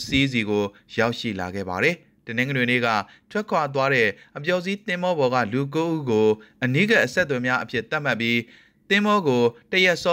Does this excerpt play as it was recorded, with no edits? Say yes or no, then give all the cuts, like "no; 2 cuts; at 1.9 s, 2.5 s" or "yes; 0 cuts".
yes; 0 cuts